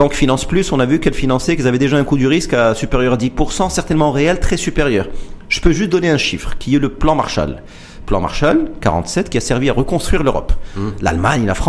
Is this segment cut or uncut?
uncut